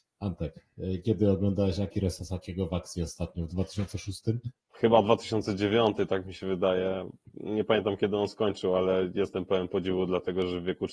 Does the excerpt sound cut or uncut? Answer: uncut